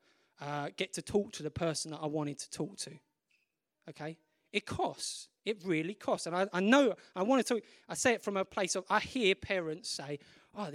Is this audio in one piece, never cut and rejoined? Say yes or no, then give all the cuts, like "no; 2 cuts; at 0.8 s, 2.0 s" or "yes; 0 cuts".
yes; 0 cuts